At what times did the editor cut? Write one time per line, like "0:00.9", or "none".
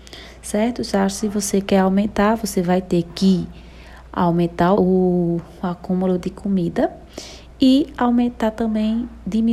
0:04.8